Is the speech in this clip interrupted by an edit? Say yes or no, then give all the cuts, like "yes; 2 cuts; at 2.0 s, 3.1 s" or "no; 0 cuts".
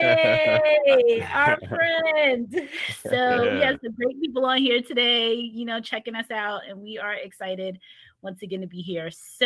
no; 0 cuts